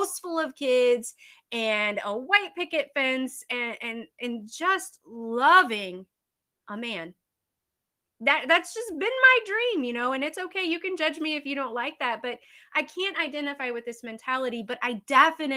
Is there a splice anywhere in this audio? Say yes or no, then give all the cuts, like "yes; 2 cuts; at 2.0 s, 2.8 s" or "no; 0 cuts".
no; 0 cuts